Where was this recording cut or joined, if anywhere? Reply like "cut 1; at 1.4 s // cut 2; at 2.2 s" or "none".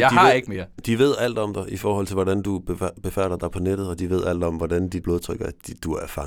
cut 1; at 5.0 s